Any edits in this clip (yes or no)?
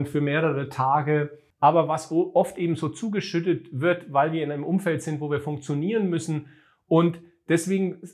yes